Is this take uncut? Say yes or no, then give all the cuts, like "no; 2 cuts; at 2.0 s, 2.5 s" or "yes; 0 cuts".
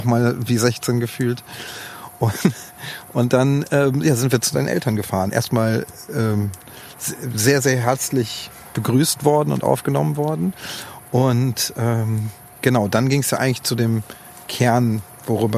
yes; 0 cuts